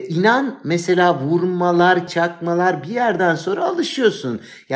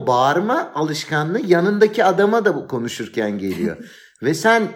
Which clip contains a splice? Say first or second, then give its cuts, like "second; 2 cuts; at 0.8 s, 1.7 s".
first; 1 cut; at 2.1 s